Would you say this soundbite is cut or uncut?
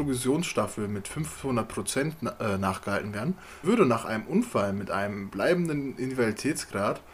cut